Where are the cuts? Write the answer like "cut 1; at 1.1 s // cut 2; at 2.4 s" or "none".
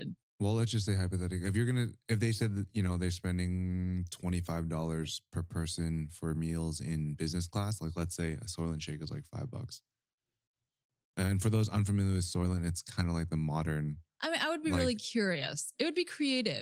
none